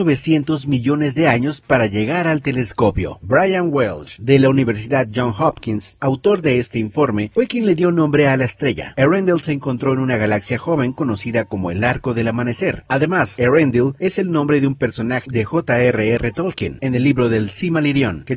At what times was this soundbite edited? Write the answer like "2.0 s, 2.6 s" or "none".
8.9 s